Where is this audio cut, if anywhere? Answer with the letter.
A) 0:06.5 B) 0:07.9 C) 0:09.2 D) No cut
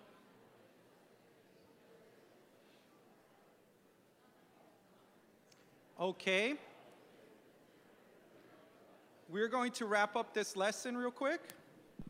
D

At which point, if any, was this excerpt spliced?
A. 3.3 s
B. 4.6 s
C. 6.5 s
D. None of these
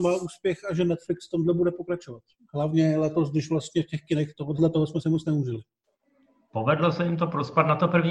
B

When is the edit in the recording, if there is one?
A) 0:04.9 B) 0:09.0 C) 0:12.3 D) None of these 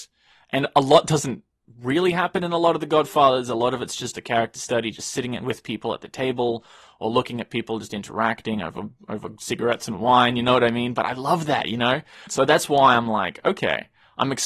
C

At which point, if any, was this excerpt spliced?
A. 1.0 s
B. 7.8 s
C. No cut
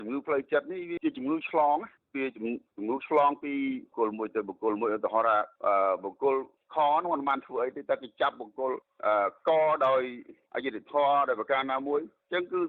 A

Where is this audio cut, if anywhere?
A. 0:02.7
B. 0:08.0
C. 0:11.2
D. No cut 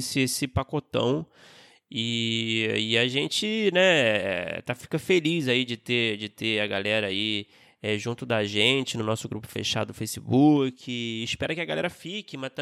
D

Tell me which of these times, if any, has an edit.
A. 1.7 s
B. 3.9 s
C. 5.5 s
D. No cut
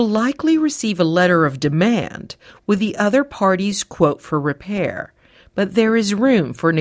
D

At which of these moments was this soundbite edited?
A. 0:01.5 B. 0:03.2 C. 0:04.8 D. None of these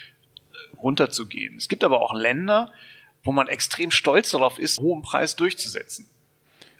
C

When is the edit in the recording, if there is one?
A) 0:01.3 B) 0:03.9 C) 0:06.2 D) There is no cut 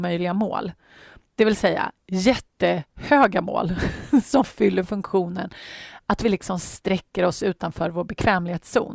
D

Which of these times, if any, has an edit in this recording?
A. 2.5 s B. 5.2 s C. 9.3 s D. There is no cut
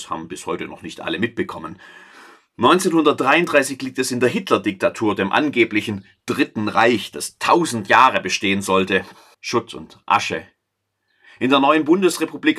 C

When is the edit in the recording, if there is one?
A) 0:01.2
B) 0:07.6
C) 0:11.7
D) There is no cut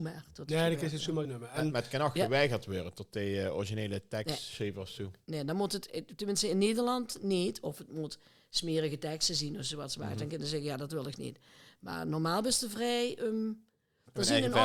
A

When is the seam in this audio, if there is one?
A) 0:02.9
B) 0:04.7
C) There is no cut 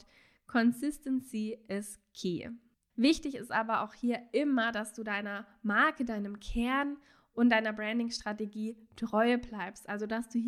A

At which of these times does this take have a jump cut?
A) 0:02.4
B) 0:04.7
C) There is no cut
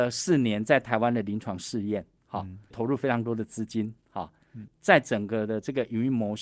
B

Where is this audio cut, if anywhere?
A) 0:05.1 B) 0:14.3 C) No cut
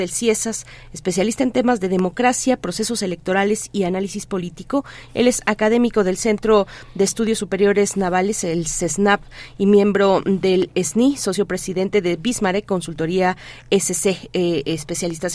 A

